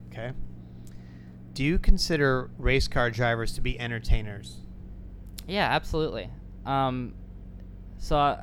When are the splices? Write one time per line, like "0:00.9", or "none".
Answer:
none